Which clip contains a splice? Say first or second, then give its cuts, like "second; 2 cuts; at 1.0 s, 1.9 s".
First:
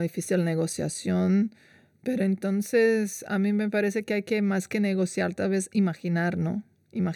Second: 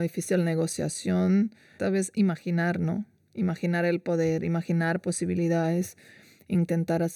second; 1 cut; at 1.8 s